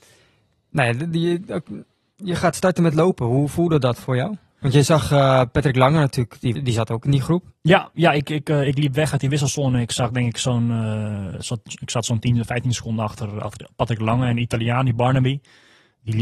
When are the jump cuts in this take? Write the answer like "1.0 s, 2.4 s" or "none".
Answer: 6.5 s